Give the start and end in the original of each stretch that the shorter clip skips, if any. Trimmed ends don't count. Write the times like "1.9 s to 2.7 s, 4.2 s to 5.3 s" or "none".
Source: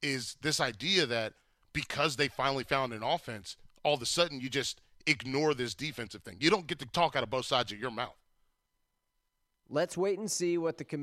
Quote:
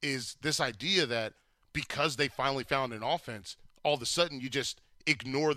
none